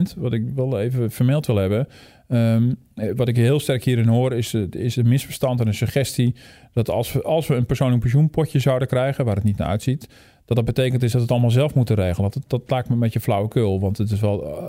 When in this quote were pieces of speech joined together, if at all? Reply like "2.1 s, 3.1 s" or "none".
none